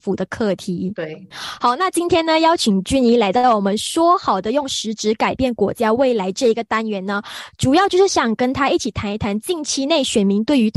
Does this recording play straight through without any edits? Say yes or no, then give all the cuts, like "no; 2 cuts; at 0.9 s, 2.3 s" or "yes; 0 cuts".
yes; 0 cuts